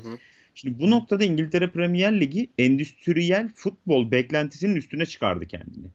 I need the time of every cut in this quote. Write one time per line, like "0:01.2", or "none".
none